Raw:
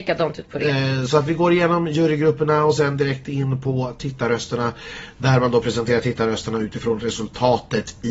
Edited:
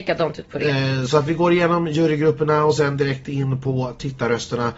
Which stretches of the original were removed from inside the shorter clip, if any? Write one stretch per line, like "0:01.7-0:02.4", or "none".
none